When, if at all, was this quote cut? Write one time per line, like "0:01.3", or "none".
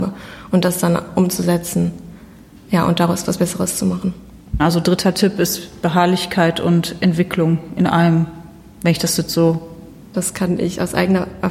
0:04.6
0:10.1